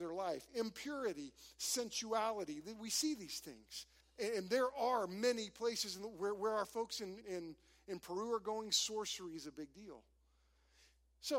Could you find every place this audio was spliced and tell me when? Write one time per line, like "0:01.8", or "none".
0:04.0
0:07.2